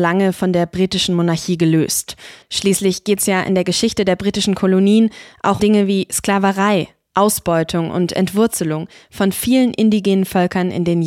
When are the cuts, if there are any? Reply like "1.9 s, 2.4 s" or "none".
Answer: 2.4 s, 5.6 s